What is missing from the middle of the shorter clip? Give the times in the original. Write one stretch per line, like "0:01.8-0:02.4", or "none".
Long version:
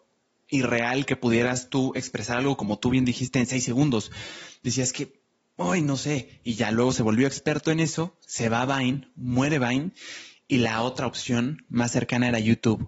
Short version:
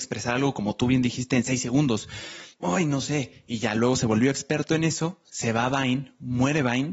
0:04.6-0:05.5